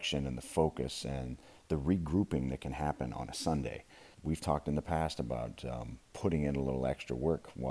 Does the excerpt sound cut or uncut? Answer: cut